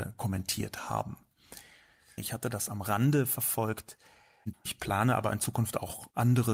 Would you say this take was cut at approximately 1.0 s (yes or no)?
no